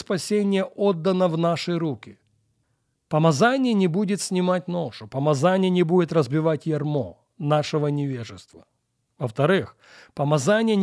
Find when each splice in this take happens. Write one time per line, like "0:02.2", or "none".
0:02.9